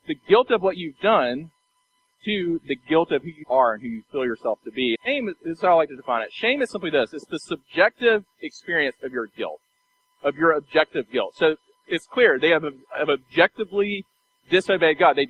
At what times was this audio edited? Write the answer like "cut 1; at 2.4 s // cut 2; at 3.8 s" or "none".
cut 1; at 3.4 s // cut 2; at 4.9 s